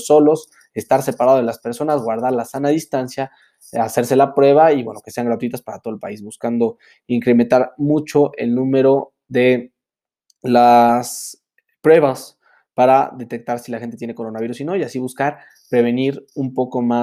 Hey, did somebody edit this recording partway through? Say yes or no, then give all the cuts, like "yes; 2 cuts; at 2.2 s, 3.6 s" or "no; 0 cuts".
no; 0 cuts